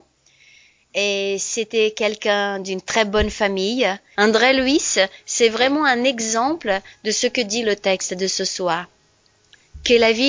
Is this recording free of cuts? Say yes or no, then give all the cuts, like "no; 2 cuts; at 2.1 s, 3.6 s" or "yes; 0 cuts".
no; 1 cut; at 4.1 s